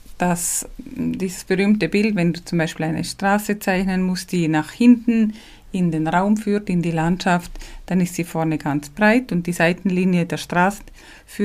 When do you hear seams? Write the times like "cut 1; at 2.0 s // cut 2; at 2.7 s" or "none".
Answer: none